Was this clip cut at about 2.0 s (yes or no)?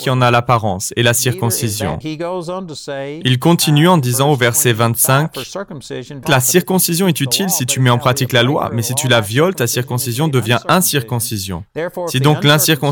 yes